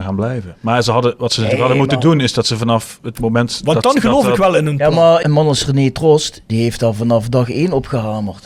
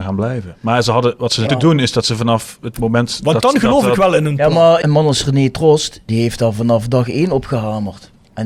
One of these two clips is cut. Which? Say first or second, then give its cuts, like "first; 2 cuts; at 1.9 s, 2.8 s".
second; 1 cut; at 1.5 s